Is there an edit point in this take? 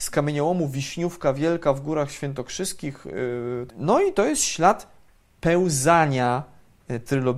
yes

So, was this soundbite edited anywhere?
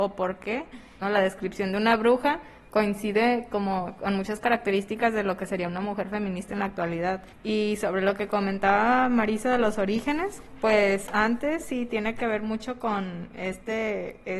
yes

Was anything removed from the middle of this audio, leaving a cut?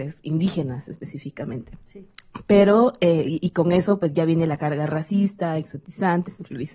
no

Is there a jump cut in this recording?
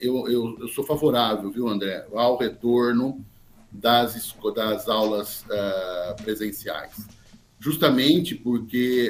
no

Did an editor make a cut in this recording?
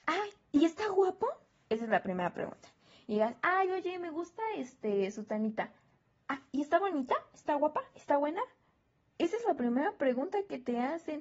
no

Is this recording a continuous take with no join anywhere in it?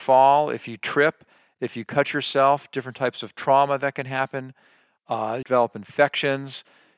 no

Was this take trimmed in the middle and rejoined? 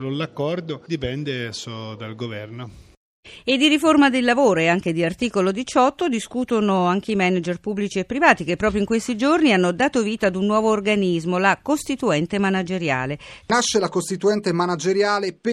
yes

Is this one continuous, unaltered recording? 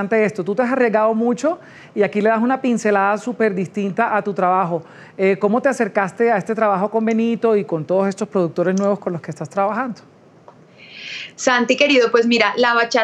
yes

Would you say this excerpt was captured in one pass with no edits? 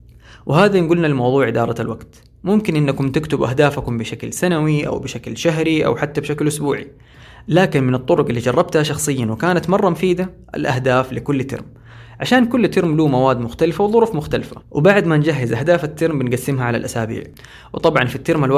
no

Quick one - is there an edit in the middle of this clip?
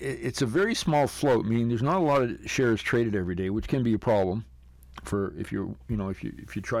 no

